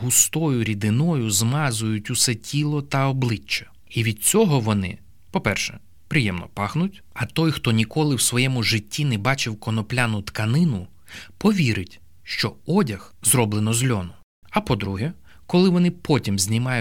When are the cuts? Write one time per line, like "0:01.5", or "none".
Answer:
0:07.0
0:14.4